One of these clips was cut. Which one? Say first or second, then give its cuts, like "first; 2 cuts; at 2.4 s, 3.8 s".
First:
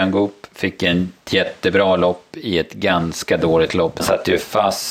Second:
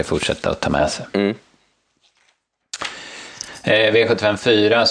first; 1 cut; at 4.0 s